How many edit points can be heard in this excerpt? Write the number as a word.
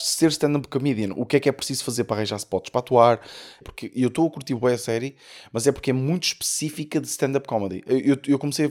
one